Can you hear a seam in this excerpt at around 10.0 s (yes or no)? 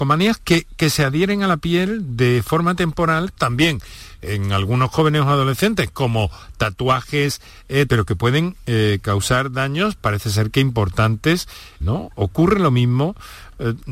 no